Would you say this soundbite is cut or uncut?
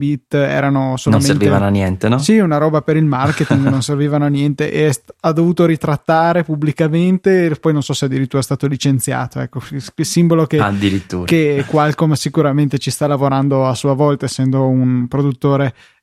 uncut